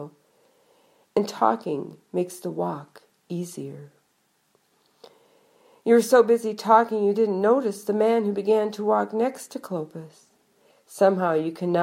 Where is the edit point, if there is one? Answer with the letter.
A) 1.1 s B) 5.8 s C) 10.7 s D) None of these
C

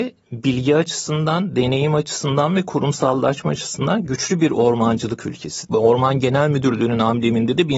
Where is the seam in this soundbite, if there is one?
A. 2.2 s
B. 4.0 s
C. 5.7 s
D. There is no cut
C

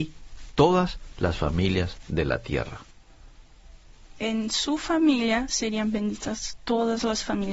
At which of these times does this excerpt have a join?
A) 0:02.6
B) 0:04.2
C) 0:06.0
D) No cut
B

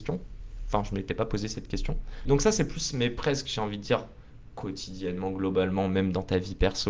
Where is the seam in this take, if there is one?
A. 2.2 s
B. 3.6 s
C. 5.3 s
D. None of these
A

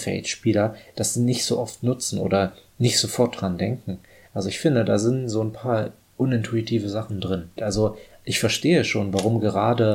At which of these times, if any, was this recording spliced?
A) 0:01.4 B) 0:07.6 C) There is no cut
B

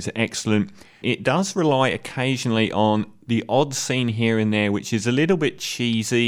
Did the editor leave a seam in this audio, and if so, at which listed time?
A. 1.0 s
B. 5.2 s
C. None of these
A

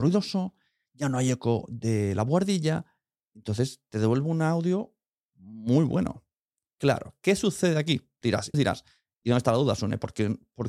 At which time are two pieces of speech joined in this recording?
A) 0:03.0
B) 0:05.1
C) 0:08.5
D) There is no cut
C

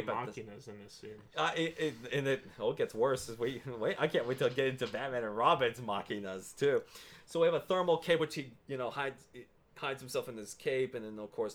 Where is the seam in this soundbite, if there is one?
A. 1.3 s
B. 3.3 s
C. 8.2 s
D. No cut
D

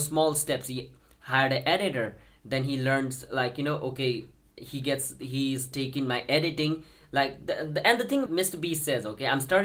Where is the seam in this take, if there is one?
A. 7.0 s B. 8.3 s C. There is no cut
B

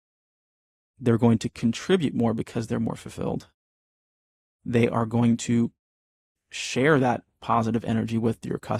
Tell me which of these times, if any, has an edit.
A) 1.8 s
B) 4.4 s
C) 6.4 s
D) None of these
C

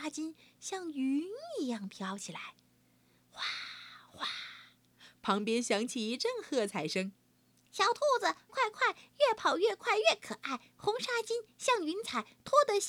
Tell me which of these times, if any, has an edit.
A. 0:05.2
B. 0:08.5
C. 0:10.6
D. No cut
B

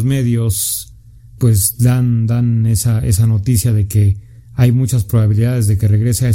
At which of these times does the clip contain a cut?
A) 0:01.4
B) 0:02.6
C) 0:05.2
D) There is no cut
A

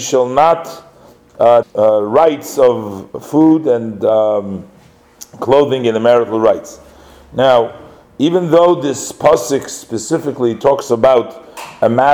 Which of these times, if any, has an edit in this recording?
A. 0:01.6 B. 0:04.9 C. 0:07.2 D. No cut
A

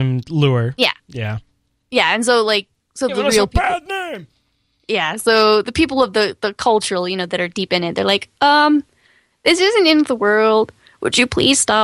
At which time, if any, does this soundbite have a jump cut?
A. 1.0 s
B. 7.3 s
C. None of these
C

